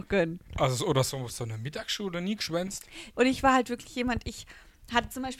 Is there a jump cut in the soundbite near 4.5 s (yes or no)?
no